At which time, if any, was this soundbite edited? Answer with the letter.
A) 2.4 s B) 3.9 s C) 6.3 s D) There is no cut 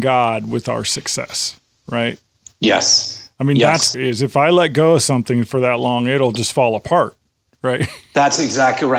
B